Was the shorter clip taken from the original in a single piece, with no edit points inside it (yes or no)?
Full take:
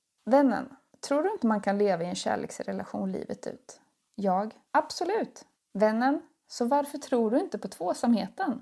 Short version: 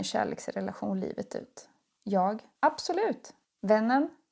yes